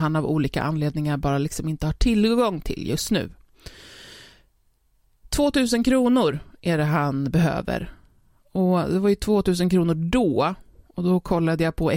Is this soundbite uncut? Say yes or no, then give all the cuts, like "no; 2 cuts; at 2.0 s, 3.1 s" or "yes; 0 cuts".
yes; 0 cuts